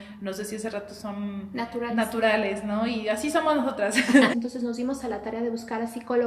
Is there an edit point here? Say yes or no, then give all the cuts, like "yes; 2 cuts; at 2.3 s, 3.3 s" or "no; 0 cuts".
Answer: yes; 1 cut; at 4.3 s